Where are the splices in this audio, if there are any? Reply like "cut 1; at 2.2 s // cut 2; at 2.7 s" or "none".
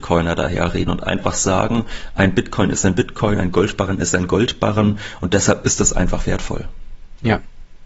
none